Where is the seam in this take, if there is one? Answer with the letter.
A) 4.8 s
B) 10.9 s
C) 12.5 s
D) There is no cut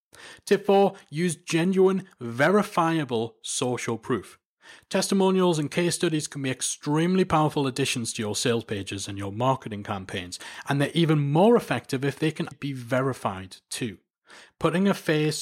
C